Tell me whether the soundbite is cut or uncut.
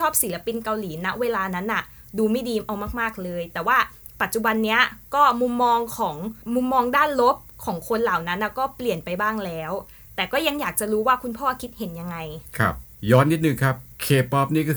uncut